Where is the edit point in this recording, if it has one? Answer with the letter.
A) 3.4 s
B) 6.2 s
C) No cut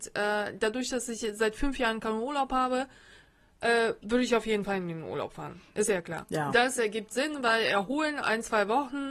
B